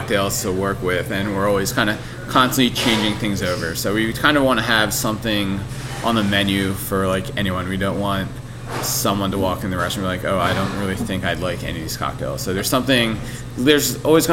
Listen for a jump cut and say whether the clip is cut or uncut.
uncut